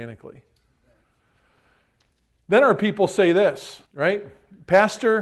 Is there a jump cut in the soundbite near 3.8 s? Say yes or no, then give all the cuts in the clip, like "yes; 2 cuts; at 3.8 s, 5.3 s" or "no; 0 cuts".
yes; 1 cut; at 3.8 s